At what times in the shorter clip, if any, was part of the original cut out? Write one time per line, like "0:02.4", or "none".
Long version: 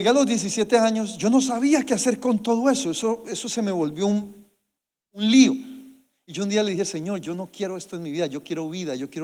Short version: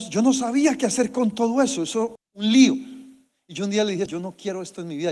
0:02.2
0:04.1